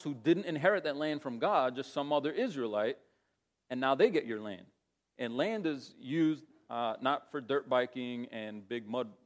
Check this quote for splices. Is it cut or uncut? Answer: uncut